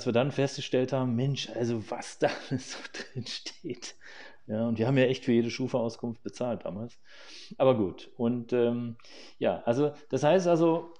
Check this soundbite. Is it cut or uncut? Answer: uncut